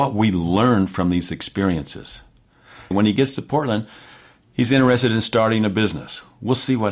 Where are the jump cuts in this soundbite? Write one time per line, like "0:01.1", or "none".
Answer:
0:02.9